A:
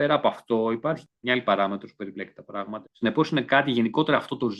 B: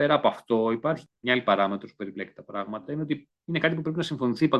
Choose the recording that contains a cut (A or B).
A